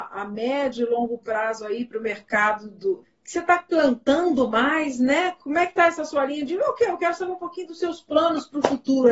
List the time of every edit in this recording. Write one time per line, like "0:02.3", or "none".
0:03.0